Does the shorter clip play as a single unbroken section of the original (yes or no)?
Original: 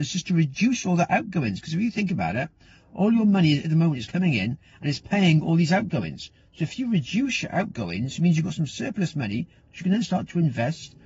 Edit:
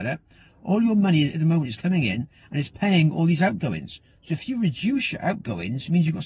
yes